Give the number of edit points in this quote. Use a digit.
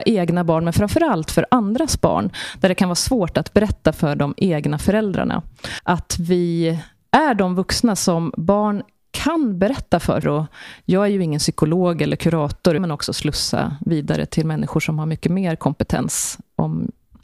3